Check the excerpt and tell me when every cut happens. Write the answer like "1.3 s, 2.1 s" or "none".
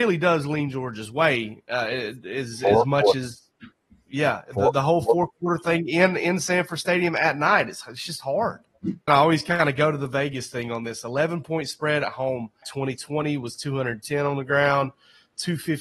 9.1 s, 12.6 s